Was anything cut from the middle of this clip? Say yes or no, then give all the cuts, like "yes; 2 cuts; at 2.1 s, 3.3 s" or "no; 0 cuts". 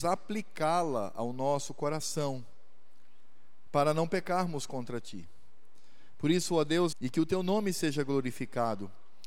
yes; 1 cut; at 6.9 s